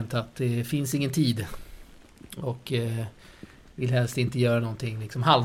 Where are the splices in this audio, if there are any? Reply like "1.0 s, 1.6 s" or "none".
none